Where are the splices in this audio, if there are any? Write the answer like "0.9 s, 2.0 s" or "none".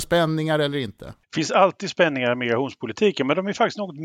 1.2 s